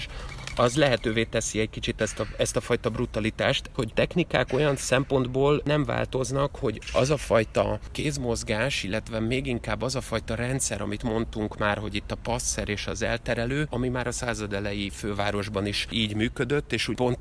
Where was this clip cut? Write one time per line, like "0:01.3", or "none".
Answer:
0:03.7
0:13.7

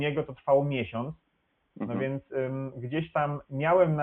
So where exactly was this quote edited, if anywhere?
none

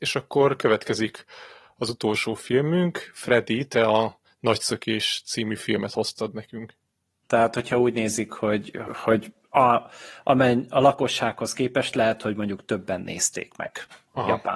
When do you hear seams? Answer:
0:07.2
0:08.9

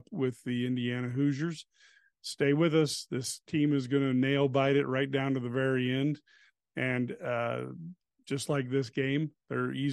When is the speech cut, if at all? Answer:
none

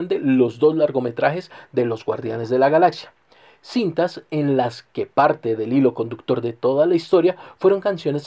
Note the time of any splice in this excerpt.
none

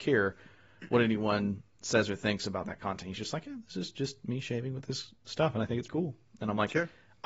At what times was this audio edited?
0:05.9

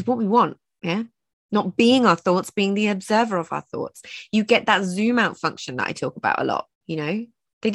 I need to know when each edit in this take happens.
0:06.7

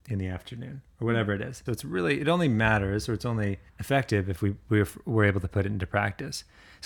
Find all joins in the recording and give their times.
0:01.7
0:03.7

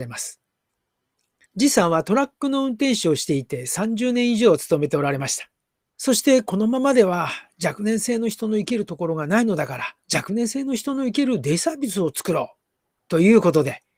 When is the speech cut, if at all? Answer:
0:01.5
0:05.9
0:10.0

